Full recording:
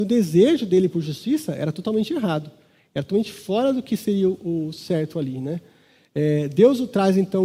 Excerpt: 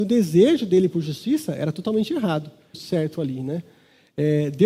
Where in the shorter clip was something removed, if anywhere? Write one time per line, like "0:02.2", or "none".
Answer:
0:02.7